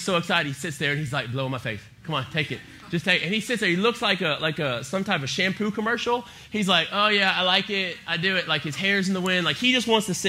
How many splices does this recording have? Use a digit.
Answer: 0